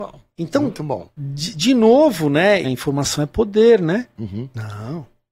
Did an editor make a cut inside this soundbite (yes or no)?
yes